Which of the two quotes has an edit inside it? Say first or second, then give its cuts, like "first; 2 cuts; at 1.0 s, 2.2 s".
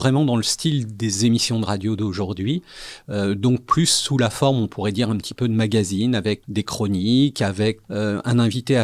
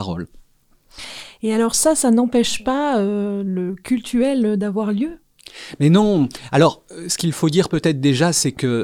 first; 2 cuts; at 6.4 s, 7.8 s